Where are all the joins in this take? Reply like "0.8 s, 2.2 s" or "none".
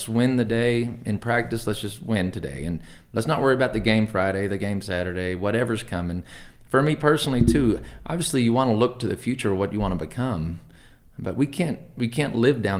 none